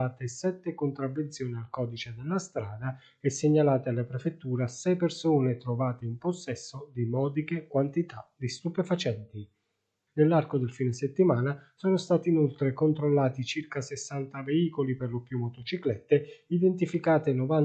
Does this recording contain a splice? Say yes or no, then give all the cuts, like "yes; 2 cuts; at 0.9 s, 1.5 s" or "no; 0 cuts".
yes; 1 cut; at 10.1 s